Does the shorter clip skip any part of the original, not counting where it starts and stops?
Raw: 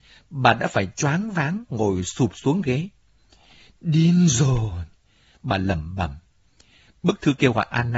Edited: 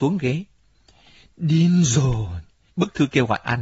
yes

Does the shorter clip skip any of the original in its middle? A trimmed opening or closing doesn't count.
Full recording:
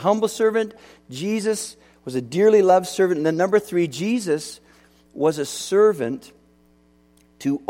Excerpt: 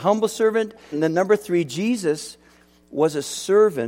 yes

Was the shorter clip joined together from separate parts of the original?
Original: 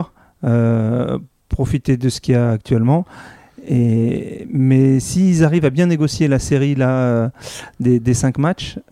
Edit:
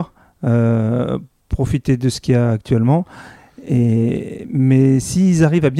no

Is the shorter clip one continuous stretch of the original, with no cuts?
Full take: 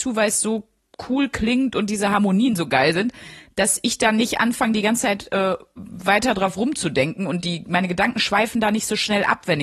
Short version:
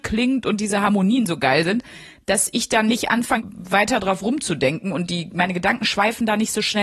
no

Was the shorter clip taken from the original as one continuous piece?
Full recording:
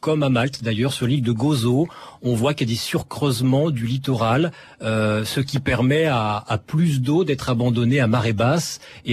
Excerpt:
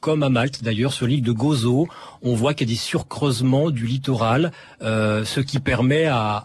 yes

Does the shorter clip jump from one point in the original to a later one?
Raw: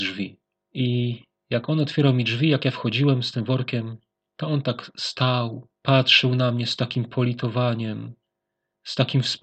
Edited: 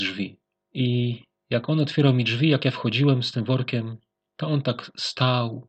no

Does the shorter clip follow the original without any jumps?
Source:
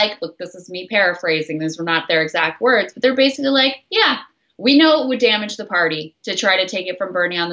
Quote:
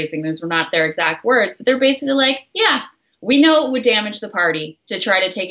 yes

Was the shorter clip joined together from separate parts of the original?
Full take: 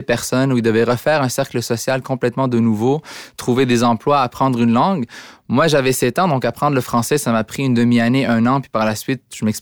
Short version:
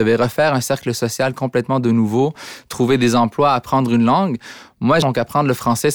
yes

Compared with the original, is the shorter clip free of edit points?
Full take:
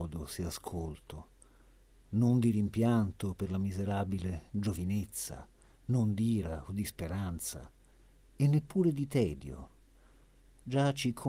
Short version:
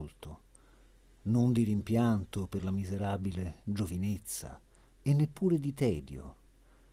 no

